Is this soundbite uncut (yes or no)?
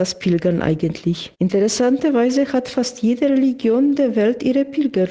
no